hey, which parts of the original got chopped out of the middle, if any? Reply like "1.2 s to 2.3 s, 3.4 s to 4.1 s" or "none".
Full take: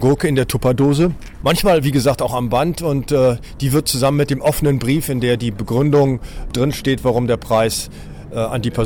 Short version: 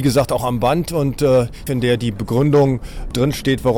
3.6 s to 5.1 s

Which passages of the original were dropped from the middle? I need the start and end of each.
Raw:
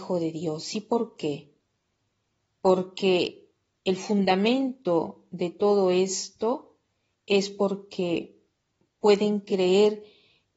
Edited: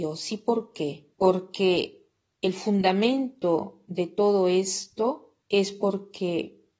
1.6 s to 2.6 s, 6.8 s to 7.2 s

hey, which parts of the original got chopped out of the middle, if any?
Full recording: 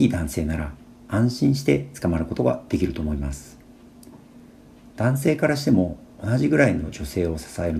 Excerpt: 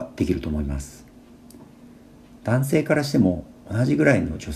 none

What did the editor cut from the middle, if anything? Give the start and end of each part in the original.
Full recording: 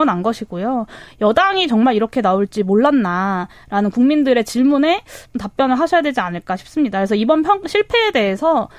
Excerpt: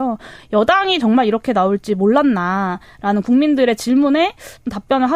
none

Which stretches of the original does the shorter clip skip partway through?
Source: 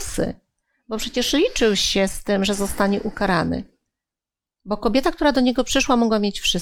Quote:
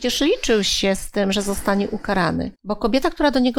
3.7 s to 4.6 s

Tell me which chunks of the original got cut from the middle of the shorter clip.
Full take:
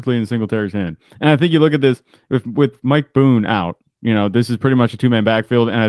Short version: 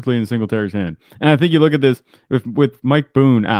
none

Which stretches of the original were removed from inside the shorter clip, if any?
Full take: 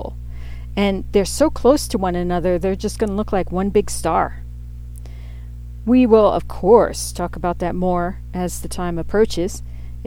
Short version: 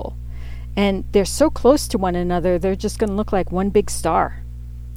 none

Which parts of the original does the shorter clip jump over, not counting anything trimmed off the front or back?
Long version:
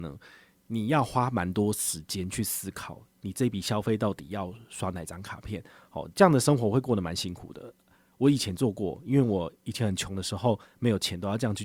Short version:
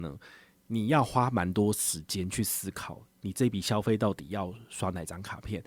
none

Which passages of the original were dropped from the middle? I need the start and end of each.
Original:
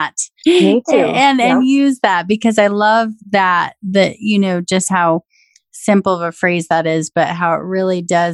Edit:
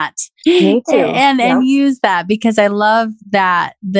none

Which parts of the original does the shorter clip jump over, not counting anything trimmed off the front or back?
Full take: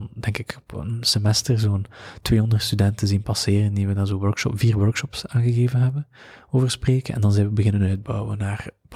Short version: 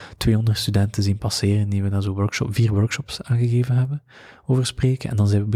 none

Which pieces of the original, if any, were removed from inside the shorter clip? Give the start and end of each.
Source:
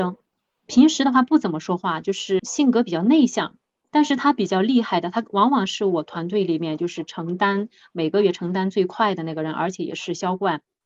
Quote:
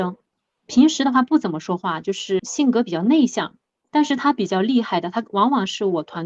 none

